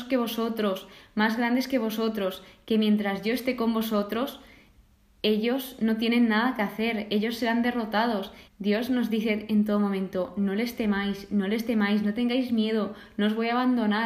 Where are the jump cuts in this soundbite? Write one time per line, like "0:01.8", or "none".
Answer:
0:08.5